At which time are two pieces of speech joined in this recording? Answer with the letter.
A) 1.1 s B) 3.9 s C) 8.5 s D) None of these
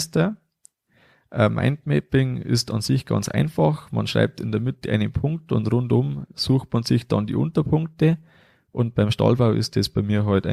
D